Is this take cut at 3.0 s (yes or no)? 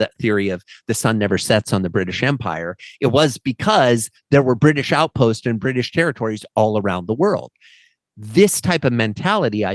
no